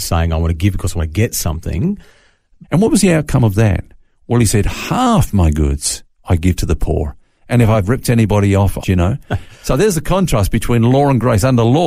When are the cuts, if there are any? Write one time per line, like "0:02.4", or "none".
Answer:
0:02.6
0:08.8